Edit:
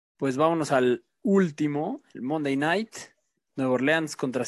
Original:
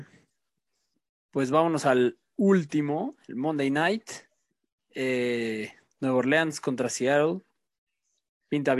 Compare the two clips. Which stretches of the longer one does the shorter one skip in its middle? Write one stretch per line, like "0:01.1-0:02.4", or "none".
0:04.6-0:05.9